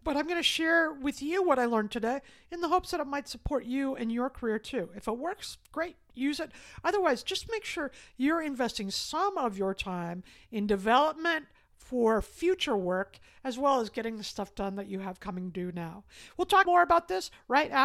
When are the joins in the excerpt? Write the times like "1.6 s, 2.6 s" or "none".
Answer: none